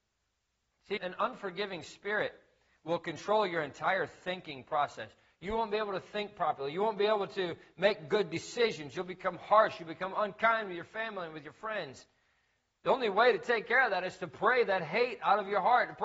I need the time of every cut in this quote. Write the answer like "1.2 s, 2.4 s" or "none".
1.0 s